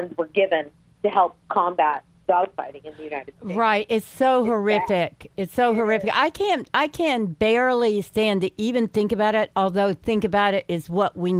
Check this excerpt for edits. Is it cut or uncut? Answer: uncut